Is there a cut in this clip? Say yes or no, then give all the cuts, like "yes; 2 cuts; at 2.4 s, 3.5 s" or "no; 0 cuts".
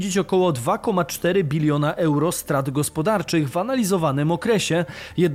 no; 0 cuts